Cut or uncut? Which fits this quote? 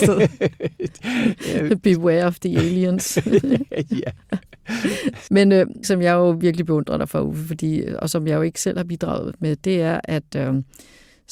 cut